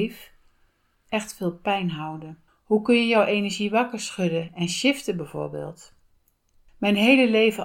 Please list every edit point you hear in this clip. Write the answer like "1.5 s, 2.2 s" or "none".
0.9 s, 2.5 s